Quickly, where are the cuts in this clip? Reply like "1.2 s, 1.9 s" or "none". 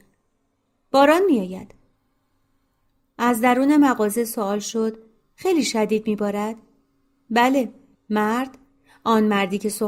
7.9 s